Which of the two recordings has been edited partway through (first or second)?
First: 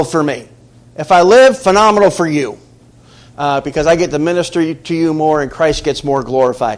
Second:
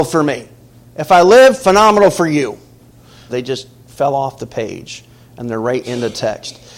second